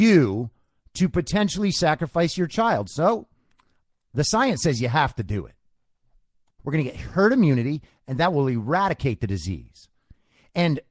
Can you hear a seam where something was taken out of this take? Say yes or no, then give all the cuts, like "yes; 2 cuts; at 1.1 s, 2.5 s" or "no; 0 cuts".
yes; 1 cut; at 6.6 s